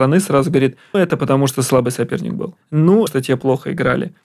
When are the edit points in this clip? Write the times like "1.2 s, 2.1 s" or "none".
0.9 s, 3.1 s